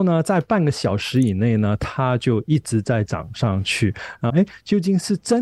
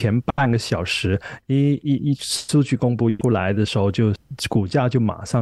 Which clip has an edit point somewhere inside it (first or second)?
first